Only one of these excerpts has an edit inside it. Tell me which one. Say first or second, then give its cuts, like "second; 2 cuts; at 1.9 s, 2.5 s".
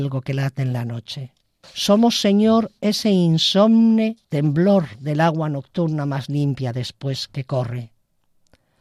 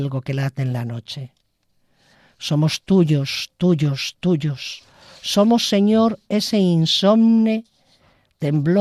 first; 2 cuts; at 1.6 s, 4.2 s